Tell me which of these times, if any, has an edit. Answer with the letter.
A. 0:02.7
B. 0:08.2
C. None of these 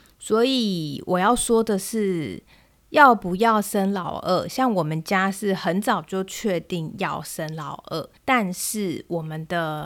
B